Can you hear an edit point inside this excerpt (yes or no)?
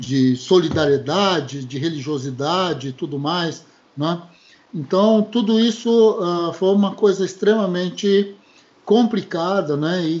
no